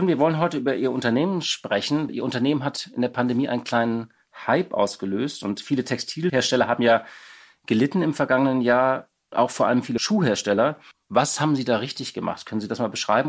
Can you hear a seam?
yes; 2 cuts; at 2.1 s, 10.9 s

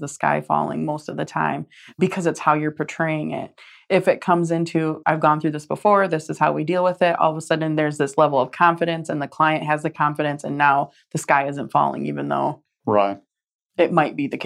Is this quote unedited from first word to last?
no; 1 cut; at 5.0 s

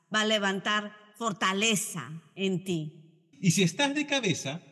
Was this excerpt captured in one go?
no; 1 cut; at 3.3 s

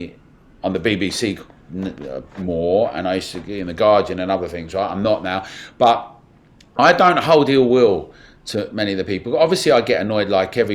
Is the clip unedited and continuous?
yes; 0 cuts

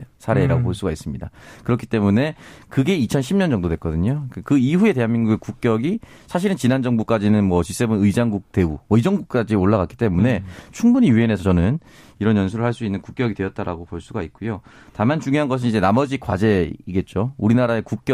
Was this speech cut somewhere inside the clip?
no; 0 cuts

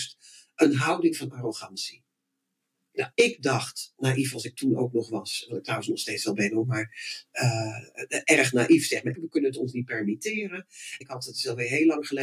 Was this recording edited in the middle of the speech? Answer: yes; 3 cuts; at 3.1 s, 9.1 s, 11.0 s

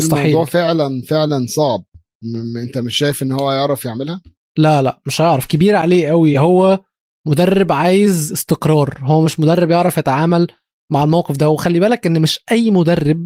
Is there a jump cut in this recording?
no; 0 cuts

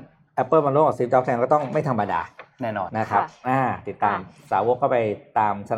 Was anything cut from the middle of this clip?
yes; 1 cut; at 2.9 s

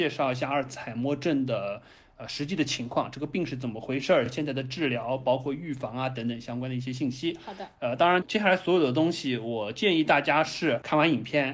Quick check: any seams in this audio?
no; 0 cuts

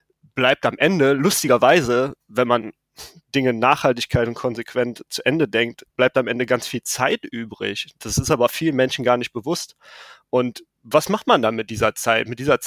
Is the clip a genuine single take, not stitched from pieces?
yes; 0 cuts

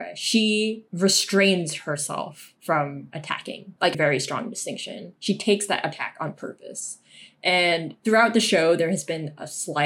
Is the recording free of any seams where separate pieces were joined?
no; 1 cut; at 3.9 s

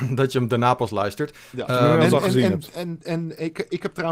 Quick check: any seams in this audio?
no; 0 cuts

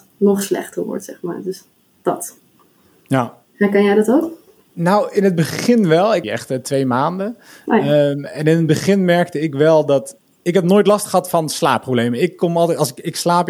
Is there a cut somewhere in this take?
yes; 1 cut; at 6.2 s

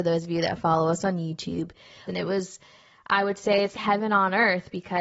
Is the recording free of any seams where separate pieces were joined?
no; 2 cuts; at 2.1 s, 3.7 s

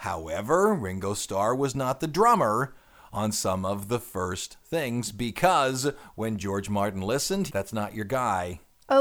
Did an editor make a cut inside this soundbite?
yes; 1 cut; at 7.5 s

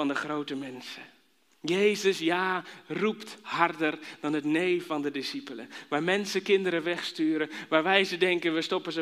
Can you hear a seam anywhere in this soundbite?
no; 0 cuts

